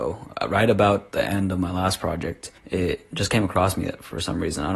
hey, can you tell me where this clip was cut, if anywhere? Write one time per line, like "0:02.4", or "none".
0:02.6